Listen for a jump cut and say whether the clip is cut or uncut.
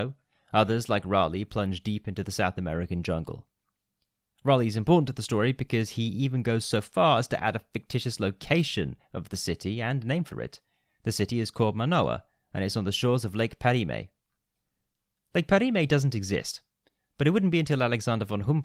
uncut